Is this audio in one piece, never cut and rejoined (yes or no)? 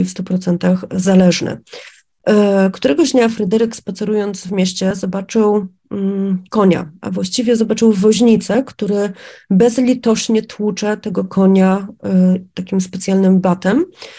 yes